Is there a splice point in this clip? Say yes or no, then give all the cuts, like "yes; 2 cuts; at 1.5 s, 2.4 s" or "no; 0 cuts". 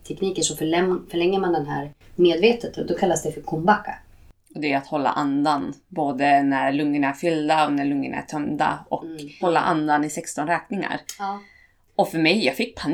yes; 1 cut; at 9.4 s